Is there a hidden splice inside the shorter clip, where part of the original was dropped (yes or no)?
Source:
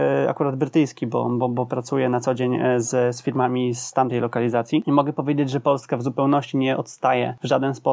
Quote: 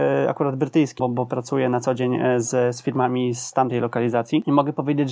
yes